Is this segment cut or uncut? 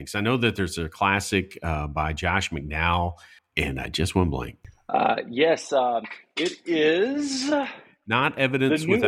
uncut